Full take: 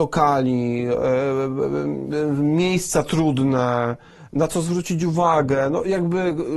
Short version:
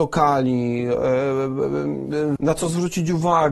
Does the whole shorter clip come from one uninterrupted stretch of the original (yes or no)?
no